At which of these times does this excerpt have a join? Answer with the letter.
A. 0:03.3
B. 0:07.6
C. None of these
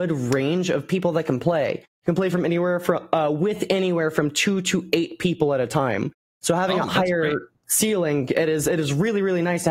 C